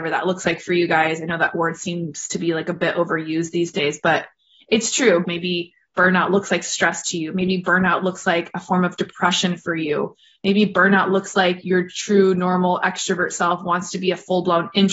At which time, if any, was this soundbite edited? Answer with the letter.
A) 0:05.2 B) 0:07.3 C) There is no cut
A